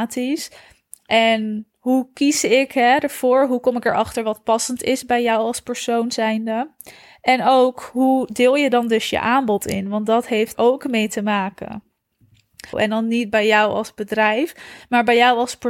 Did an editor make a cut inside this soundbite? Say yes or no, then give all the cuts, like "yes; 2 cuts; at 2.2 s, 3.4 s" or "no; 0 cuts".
yes; 2 cuts; at 10.5 s, 12.7 s